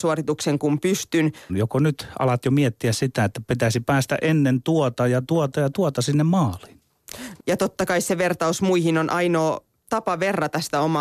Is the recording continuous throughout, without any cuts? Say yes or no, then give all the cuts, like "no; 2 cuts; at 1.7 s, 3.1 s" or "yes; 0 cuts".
no; 2 cuts; at 1.5 s, 7.4 s